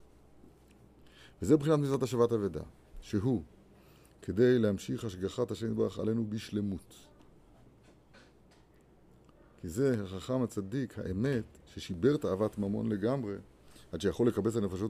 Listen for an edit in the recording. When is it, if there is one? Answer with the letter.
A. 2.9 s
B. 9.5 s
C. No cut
C